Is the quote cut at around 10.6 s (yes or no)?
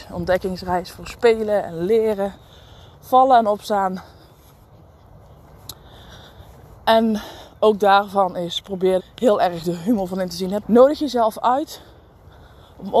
yes